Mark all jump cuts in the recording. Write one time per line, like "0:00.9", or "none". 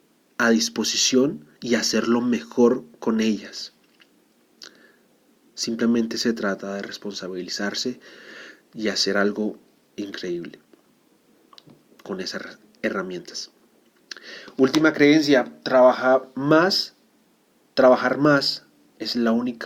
none